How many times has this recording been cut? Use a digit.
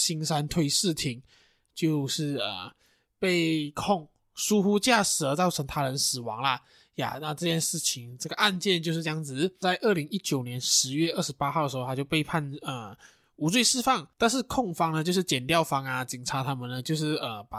1